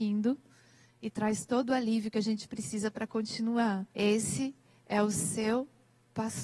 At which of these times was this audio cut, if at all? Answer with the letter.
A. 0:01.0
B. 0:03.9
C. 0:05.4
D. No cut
B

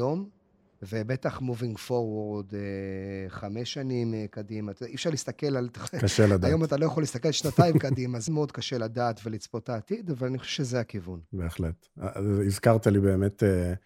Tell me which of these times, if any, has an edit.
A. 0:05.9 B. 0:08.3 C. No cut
B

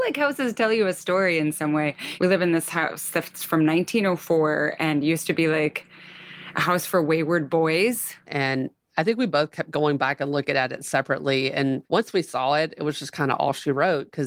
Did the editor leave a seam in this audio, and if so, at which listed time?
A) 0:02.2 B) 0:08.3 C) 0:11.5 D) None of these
B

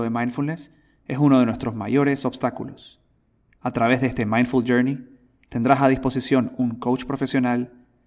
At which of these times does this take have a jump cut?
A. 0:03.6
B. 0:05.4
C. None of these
A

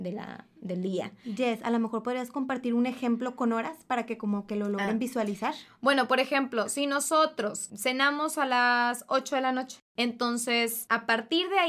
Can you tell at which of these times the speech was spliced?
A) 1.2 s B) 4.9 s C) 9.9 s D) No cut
D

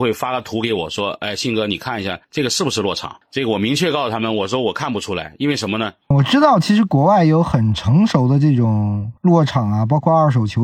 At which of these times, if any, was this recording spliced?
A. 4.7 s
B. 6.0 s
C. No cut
B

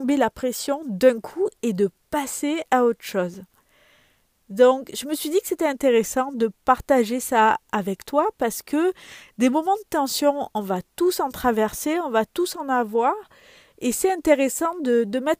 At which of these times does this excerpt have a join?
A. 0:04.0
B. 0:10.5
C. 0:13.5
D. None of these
D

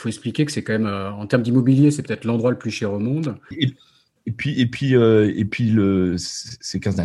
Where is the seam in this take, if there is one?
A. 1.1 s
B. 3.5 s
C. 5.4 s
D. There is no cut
B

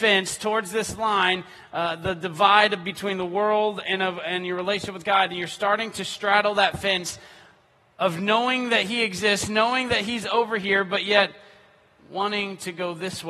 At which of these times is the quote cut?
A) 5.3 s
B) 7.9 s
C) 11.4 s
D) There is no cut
D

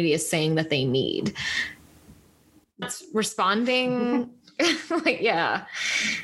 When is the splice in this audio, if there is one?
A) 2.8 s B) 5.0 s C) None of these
A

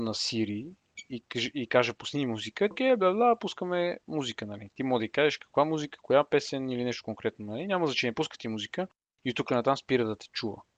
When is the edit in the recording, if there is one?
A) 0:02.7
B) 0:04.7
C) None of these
A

